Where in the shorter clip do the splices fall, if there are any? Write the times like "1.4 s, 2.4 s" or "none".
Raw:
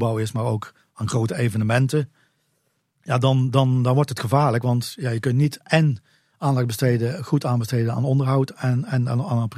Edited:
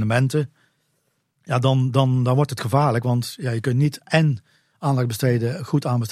none